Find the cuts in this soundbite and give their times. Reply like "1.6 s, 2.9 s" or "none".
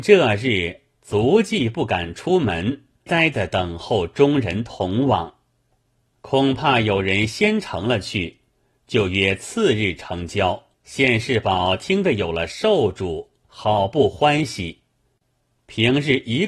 3.1 s, 6.1 s, 10.7 s

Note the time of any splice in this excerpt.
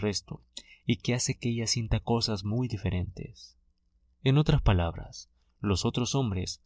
4.1 s

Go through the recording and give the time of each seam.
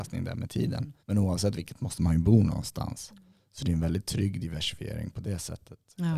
1.0 s

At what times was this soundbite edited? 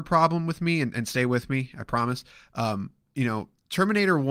none

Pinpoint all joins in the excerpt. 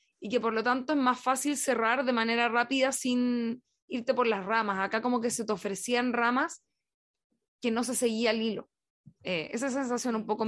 none

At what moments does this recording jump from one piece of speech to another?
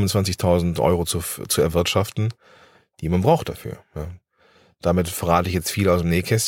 none

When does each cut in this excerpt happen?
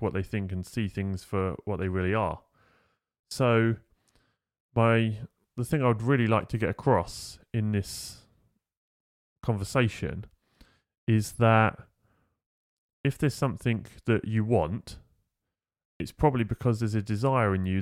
none

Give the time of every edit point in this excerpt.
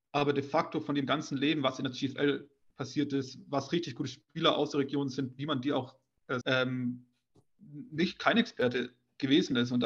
6.4 s

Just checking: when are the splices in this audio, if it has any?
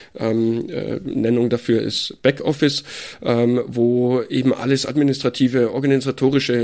none

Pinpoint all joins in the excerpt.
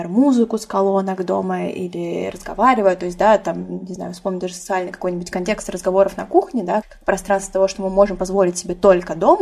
6.8 s

